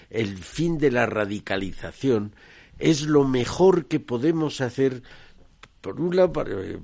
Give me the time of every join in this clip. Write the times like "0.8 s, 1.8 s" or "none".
none